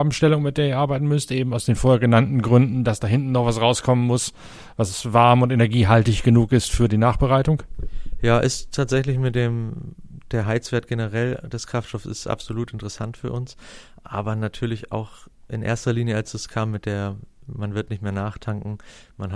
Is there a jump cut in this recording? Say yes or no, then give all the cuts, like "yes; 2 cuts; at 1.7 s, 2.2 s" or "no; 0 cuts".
no; 0 cuts